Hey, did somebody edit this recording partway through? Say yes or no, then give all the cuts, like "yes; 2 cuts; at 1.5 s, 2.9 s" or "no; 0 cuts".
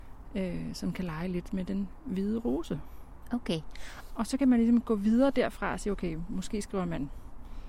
yes; 1 cut; at 4.1 s